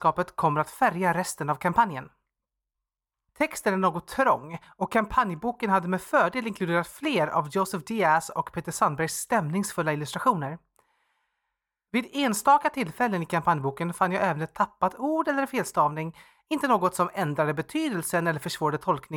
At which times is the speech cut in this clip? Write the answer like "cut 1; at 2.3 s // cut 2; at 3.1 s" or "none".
cut 1; at 3.3 s

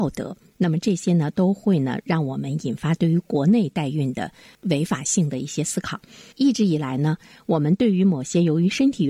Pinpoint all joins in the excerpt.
cut 1; at 6.3 s

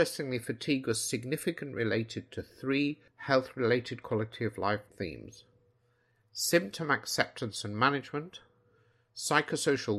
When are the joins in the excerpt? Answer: cut 1; at 3.1 s

